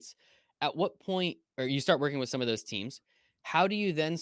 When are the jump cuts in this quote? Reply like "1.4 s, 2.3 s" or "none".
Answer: 1.5 s